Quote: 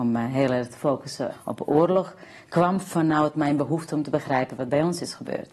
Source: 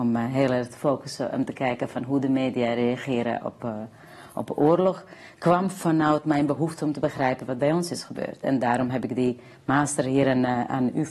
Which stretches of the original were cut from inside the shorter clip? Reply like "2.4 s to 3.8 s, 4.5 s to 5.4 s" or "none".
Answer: 1.3 s to 4.2 s